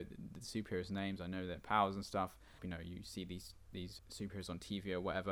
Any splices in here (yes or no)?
yes